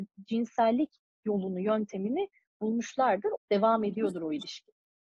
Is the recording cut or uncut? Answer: cut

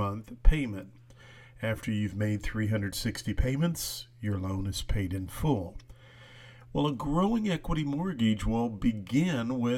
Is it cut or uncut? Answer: uncut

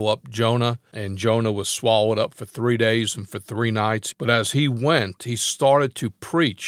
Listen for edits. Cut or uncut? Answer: cut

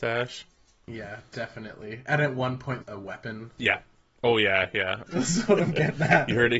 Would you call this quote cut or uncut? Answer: cut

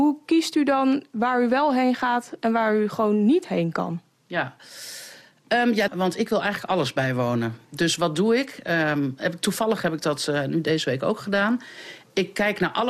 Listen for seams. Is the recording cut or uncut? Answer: cut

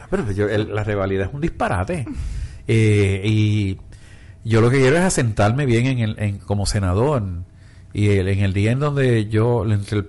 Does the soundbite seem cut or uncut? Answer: uncut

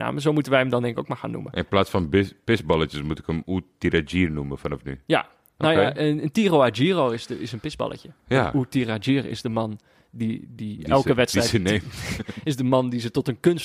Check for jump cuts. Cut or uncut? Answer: uncut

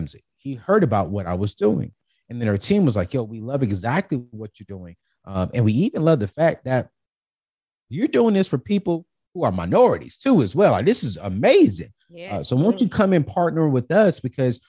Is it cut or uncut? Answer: uncut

